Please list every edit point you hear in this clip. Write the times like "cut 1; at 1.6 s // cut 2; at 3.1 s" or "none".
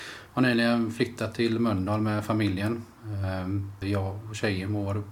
cut 1; at 3.8 s